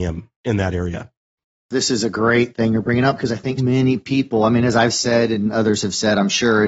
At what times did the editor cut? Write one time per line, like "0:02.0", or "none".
0:03.6